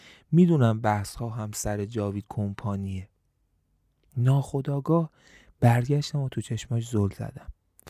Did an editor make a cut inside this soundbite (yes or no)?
no